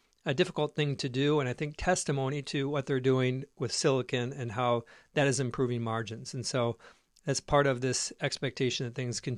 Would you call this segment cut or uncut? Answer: uncut